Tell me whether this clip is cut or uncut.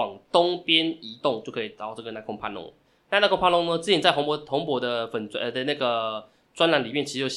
uncut